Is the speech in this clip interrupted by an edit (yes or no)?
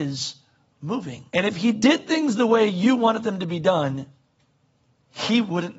yes